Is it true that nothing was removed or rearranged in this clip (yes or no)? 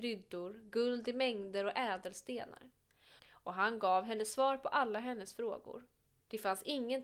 no